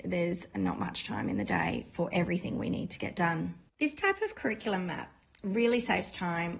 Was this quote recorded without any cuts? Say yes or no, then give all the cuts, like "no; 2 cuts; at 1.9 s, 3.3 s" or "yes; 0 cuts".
yes; 0 cuts